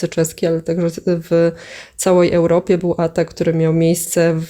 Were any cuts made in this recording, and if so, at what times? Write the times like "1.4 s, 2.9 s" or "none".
none

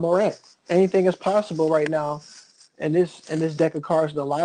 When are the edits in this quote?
none

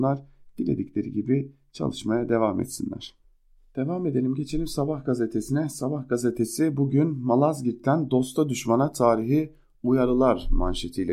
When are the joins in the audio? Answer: none

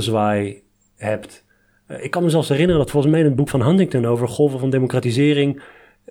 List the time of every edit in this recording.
3.5 s

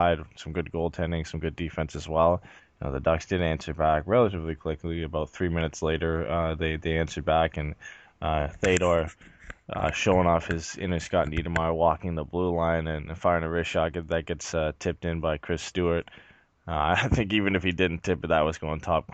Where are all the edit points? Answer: 2.6 s

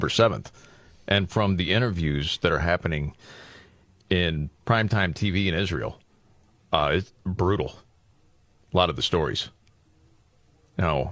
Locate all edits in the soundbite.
none

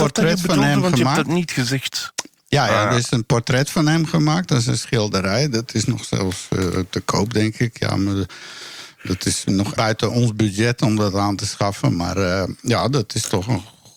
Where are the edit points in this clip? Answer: 9.8 s

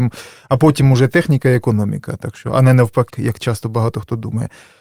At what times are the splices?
3.1 s

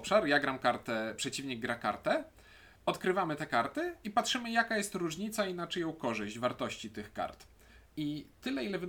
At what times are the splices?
2.8 s

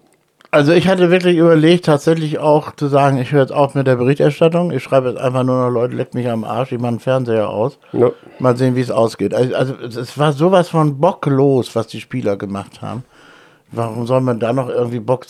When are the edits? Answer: none

